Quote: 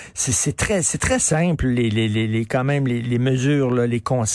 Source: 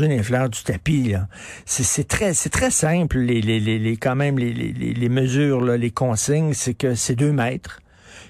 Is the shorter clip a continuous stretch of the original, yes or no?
no